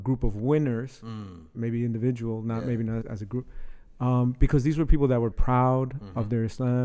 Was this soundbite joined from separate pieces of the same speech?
yes; 2 cuts; at 3.0 s, 5.3 s

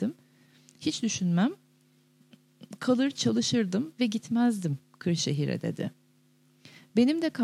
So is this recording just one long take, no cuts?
yes; 0 cuts

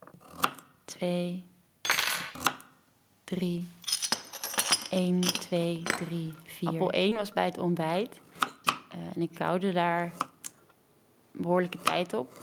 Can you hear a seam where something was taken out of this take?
yes; 1 cut; at 8.6 s

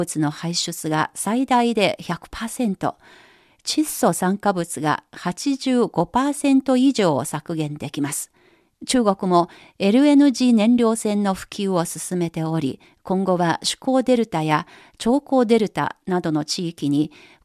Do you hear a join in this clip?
no; 0 cuts

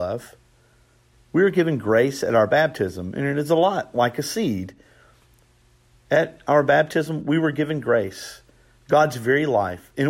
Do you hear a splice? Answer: yes; 1 cut; at 1.2 s

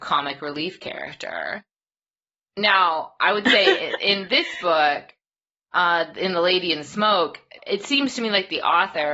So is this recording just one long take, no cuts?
no; 1 cut; at 7.6 s

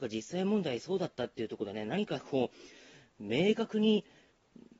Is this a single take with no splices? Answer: yes; 0 cuts

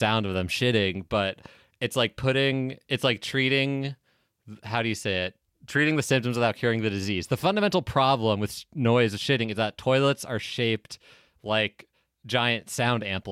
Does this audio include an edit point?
no; 0 cuts

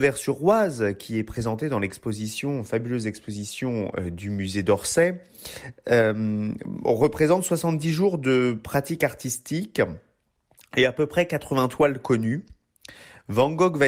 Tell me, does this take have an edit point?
no; 0 cuts

